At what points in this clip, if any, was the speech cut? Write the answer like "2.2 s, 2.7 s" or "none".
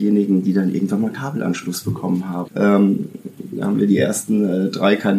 2.4 s